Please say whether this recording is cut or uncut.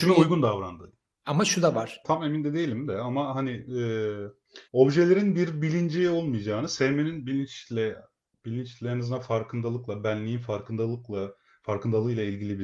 cut